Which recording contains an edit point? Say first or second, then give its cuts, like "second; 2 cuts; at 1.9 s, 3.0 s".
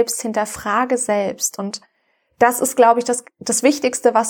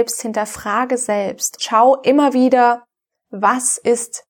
second; 1 cut; at 1.6 s